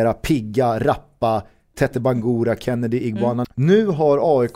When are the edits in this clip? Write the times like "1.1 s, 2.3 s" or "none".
3.4 s